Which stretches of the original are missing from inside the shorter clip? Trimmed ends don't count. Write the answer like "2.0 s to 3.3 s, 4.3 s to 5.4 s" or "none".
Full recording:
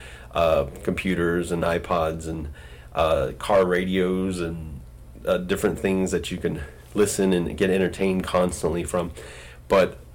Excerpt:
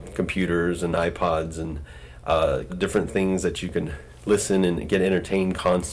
3.4 s to 5.4 s